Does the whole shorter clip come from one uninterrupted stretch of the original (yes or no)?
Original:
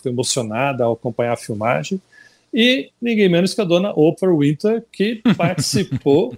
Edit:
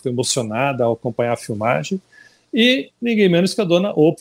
yes